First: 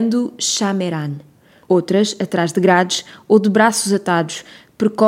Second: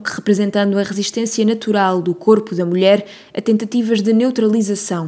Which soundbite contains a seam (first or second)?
first